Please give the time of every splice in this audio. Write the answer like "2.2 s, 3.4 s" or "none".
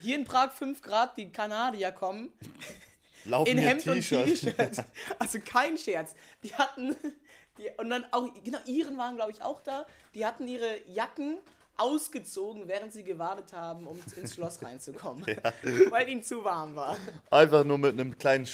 none

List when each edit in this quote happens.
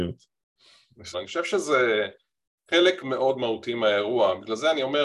1.1 s, 3.0 s

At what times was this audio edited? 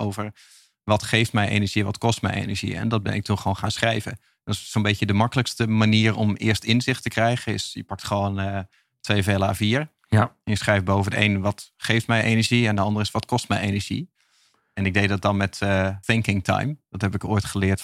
16.0 s

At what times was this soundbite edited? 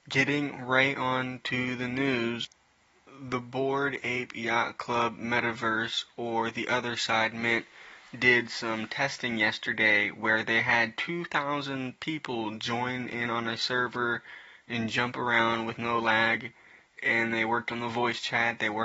none

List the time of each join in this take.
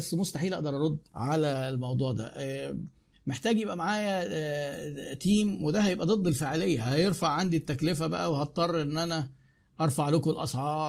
1.1 s

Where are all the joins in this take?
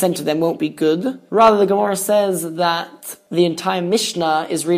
1.3 s

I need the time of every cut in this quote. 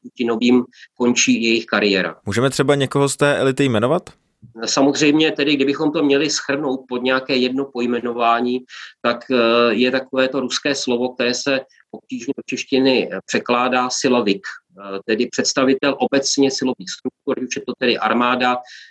none

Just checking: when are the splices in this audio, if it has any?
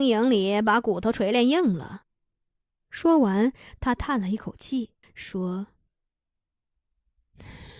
2.0 s, 5.0 s

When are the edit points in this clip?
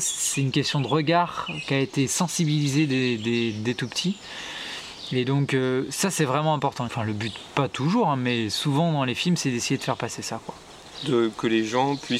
6.9 s

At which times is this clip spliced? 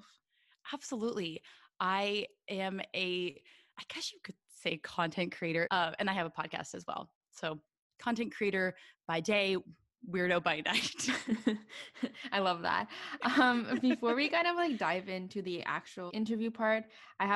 5.6 s, 16.1 s

